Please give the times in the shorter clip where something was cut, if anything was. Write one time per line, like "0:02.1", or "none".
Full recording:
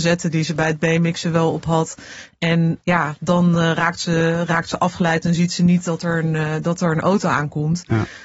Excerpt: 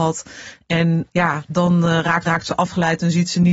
0:02.2